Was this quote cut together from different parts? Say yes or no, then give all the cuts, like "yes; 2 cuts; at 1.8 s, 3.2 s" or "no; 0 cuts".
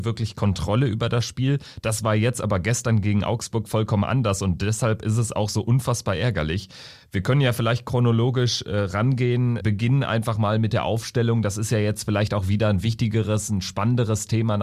yes; 1 cut; at 9.6 s